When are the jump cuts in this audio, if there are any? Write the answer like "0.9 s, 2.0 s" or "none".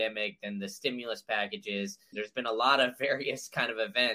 2.1 s